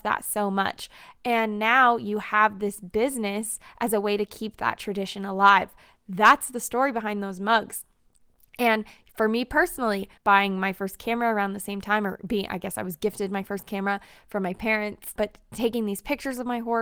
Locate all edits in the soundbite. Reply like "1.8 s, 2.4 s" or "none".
10.2 s, 15.2 s